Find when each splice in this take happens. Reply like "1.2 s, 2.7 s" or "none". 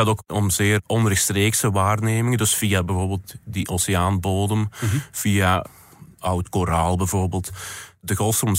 none